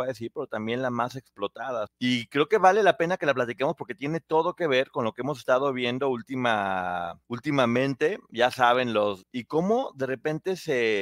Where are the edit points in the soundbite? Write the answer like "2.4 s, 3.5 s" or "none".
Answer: 1.9 s, 7.2 s, 9.2 s